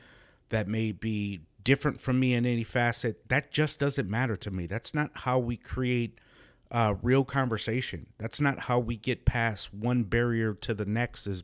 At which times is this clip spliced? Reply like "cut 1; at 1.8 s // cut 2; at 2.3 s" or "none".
none